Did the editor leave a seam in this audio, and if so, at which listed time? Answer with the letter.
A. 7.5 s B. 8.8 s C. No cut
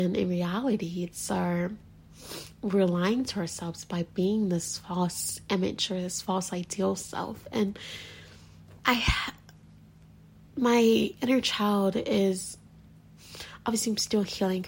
B